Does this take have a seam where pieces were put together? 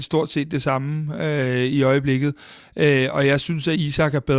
no; 0 cuts

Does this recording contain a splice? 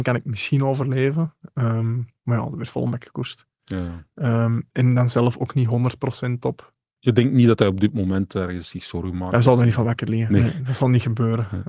yes; 1 cut; at 7.0 s

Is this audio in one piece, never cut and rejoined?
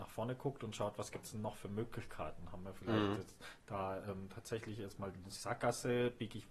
yes; 0 cuts

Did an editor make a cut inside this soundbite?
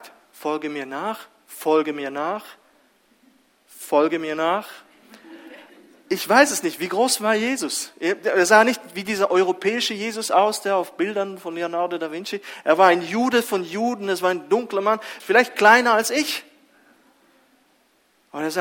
yes; 1 cut; at 15.2 s

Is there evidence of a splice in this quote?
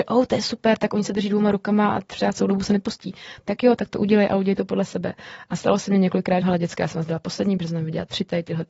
yes; 1 cut; at 6.4 s

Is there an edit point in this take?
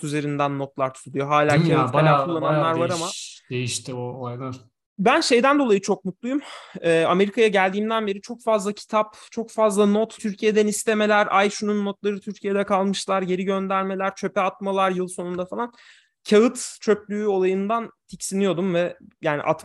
yes; 1 cut; at 10.2 s

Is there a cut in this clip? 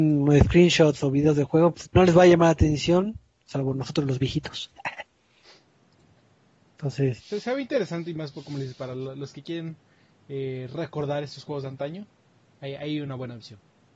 yes; 2 cuts; at 1.8 s, 7.2 s

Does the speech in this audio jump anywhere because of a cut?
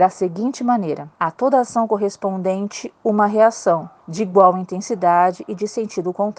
yes; 2 cuts; at 1.1 s, 4.0 s

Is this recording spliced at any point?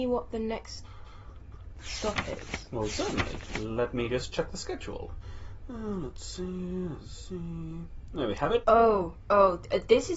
yes; 1 cut; at 8.6 s

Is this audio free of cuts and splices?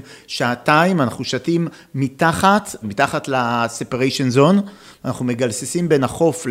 no; 1 cut; at 2.8 s

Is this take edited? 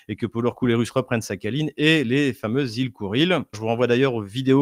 yes; 1 cut; at 3.5 s

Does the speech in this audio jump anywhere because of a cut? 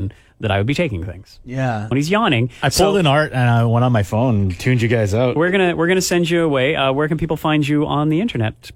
yes; 1 cut; at 1.9 s

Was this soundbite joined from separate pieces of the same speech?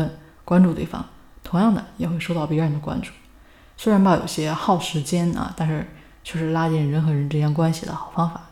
no; 0 cuts

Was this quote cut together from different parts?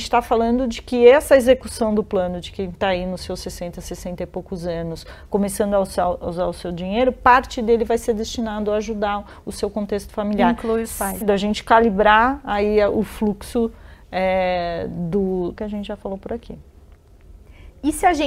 yes; 2 cuts; at 11.2 s, 15.6 s

